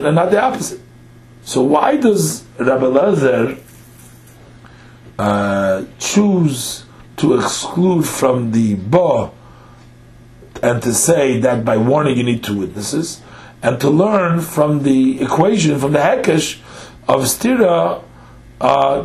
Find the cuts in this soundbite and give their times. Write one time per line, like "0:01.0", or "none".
0:01.4